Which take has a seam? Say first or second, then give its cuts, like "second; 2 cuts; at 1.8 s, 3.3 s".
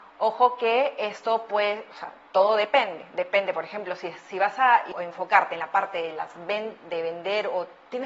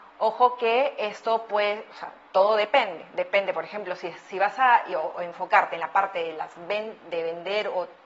first; 1 cut; at 4.9 s